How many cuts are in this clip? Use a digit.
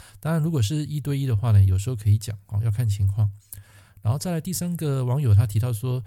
0